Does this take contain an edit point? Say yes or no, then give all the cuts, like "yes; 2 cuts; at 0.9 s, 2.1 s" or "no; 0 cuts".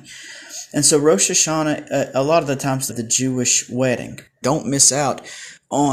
yes; 2 cuts; at 2.9 s, 4.4 s